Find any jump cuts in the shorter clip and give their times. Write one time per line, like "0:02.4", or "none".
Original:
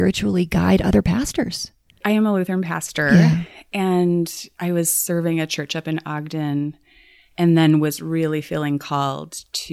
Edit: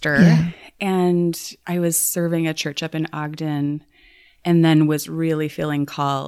none